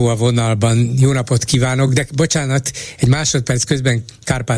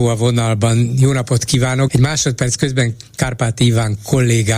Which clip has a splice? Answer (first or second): second